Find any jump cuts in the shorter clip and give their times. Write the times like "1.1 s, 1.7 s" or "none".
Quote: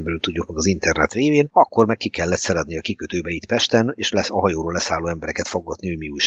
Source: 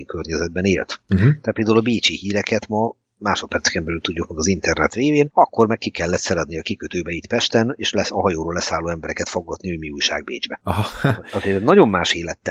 none